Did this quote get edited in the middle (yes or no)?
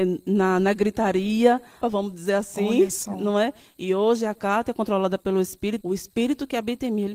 yes